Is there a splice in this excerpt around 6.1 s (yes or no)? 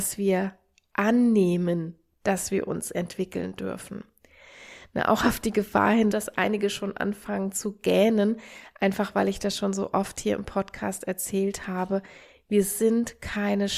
yes